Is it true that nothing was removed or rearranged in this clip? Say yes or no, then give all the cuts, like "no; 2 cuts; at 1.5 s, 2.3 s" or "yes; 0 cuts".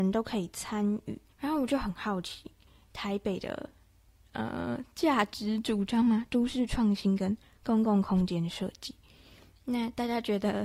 no; 1 cut; at 1.3 s